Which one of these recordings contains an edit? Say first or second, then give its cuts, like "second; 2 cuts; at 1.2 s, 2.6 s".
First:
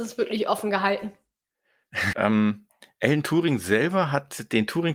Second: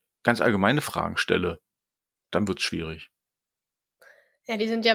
first; 1 cut; at 2.1 s